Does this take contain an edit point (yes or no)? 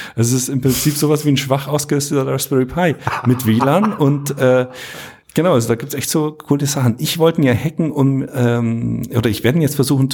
no